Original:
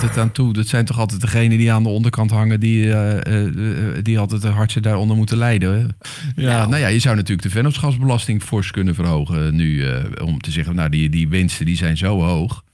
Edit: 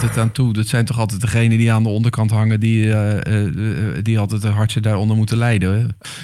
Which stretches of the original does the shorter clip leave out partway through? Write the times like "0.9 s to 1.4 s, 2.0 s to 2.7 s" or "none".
none